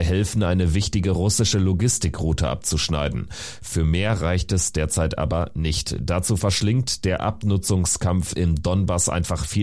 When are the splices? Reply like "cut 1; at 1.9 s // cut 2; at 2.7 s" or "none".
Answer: none